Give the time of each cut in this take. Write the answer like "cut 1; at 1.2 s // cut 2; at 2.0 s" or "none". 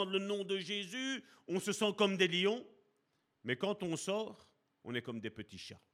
none